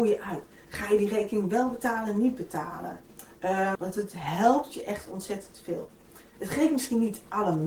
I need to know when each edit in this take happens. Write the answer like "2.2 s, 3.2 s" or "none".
3.8 s